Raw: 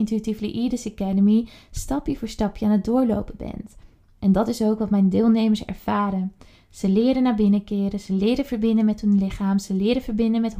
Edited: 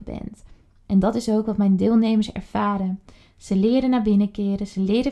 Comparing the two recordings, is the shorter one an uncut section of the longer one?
yes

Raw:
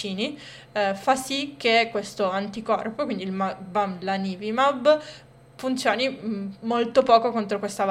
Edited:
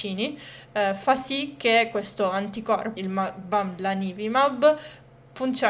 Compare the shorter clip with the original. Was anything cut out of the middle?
yes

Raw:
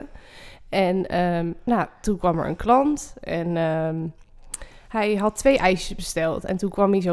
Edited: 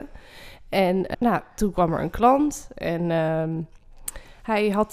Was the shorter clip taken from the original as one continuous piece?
no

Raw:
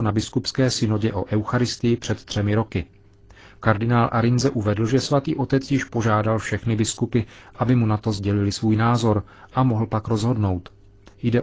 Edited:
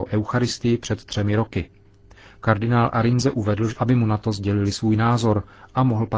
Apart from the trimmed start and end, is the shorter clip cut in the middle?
yes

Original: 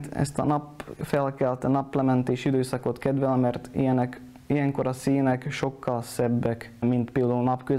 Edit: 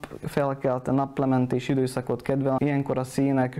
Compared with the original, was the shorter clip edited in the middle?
yes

